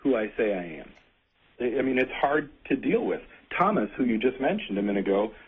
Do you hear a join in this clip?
yes; 1 cut; at 1.6 s

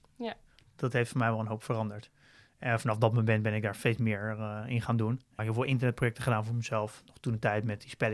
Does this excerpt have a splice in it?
yes; 1 cut; at 5.4 s

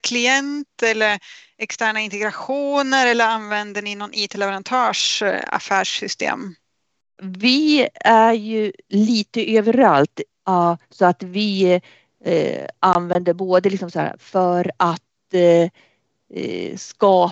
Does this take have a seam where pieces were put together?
yes; 1 cut; at 10.3 s

